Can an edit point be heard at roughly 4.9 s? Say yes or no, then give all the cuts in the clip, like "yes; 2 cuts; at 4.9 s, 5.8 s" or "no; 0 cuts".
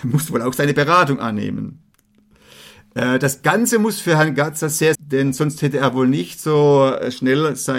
yes; 1 cut; at 4.9 s